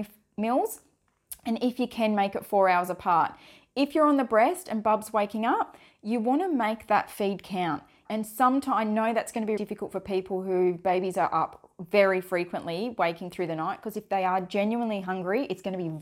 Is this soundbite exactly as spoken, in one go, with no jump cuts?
no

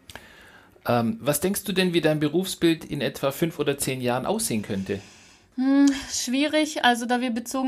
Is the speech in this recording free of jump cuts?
yes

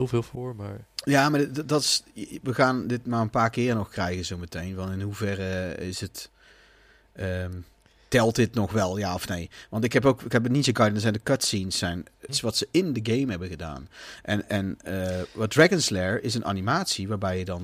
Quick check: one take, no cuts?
no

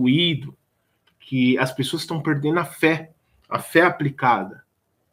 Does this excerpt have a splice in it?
no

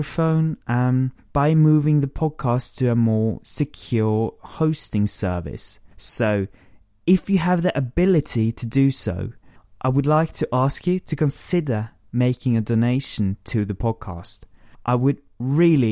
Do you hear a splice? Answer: no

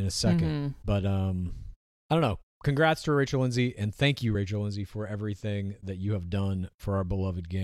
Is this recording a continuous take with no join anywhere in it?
yes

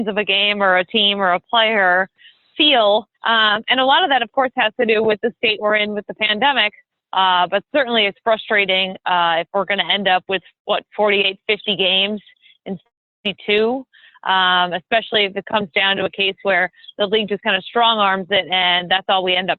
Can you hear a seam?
yes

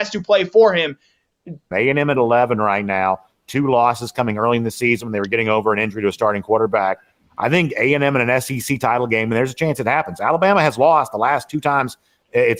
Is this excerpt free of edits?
no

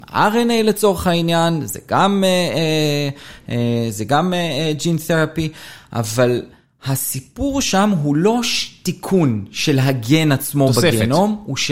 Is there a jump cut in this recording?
no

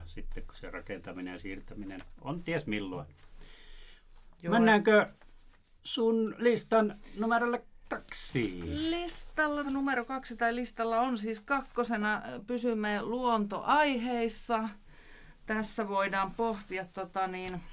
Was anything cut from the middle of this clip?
yes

